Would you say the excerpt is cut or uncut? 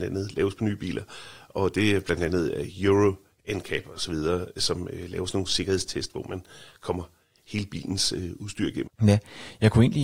cut